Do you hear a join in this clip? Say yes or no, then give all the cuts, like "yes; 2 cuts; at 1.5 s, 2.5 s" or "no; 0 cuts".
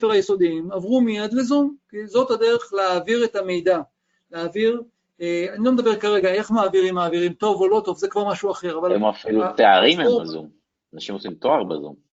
no; 0 cuts